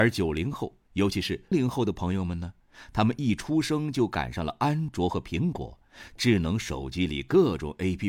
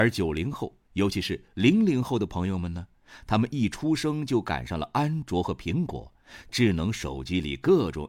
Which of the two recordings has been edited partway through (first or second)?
first